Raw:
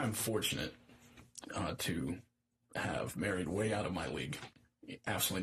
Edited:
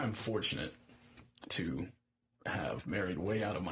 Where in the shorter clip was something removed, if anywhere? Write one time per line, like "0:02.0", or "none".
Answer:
0:01.5